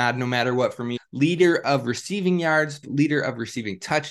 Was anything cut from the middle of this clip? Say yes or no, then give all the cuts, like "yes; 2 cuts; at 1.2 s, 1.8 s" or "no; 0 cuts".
yes; 2 cuts; at 1.0 s, 2.8 s